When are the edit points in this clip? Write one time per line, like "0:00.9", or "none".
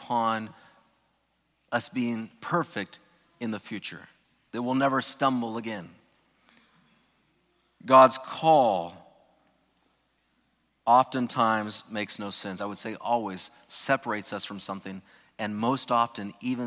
0:12.6

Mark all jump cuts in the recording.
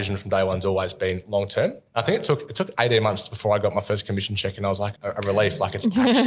0:01.9
0:05.0

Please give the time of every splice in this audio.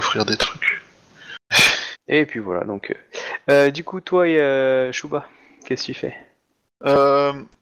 0:01.9

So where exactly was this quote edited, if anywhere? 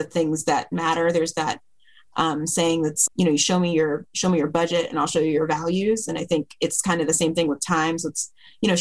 0:03.1

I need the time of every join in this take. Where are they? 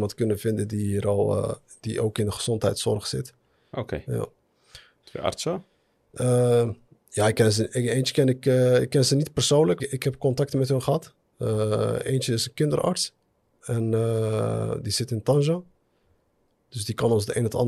0:03.7
0:05.0
0:09.8

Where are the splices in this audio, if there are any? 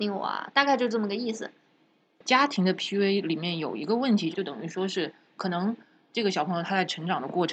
0:01.7
0:04.3

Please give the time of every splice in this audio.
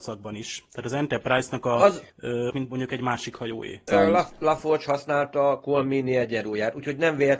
0:02.5
0:03.9

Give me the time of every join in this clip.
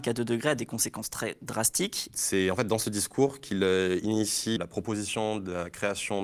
0:02.1
0:04.6

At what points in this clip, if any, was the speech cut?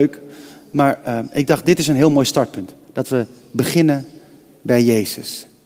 none

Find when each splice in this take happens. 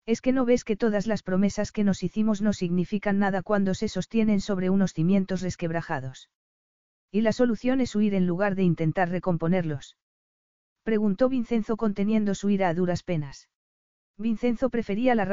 0:14.0

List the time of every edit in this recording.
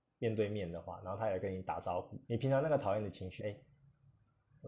0:02.2
0:03.4

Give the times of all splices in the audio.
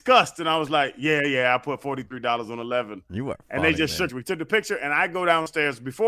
0:04.1

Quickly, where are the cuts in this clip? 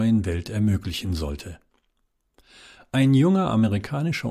none

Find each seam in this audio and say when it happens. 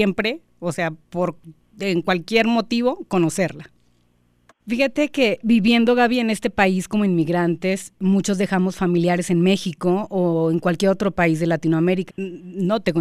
0:04.6
0:12.1

